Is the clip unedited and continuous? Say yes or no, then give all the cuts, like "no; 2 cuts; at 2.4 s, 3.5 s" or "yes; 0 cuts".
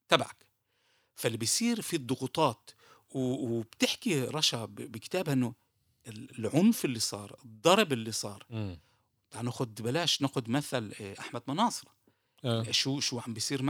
yes; 0 cuts